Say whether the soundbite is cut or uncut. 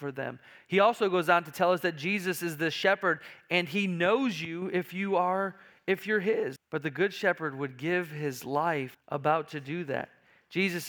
cut